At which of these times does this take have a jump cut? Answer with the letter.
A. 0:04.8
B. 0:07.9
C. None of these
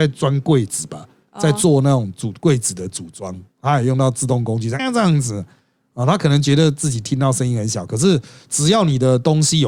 A